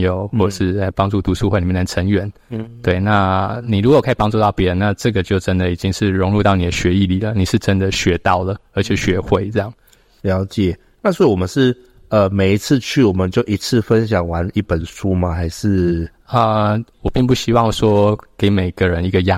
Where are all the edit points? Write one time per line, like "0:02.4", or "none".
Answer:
0:16.9